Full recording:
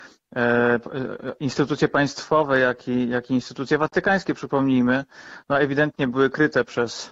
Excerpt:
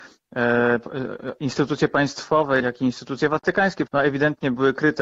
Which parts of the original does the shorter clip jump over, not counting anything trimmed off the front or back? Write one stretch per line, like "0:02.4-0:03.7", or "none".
0:02.6-0:03.1
0:04.4-0:05.4